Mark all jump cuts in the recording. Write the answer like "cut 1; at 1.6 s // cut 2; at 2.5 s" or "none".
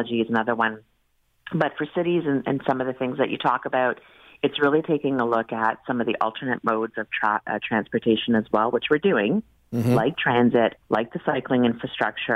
cut 1; at 10.8 s